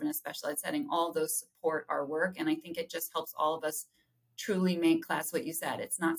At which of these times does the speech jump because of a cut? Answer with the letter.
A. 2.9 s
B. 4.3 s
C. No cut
C